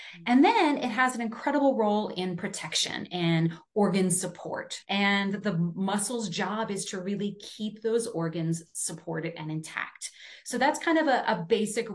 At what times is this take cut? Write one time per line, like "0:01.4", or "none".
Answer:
0:04.8